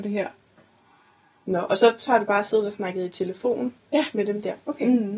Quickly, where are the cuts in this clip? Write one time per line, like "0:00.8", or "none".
none